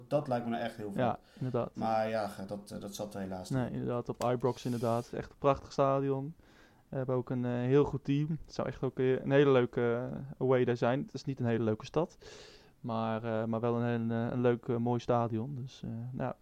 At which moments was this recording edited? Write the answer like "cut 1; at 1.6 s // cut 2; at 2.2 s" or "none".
cut 1; at 5.1 s